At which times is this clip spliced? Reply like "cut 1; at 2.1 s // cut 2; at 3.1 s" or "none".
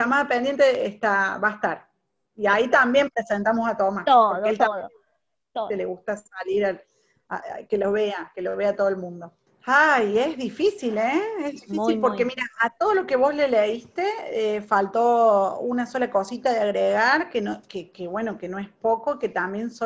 cut 1; at 9.5 s